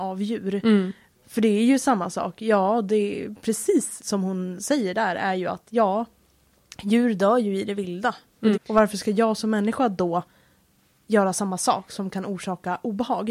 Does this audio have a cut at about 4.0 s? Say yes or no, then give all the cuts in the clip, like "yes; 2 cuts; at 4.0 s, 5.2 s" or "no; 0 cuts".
yes; 2 cuts; at 4.0 s, 8.5 s